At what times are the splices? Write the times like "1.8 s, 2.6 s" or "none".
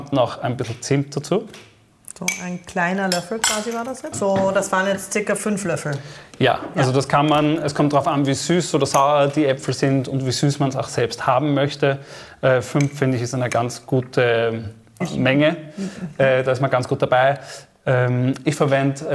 4.1 s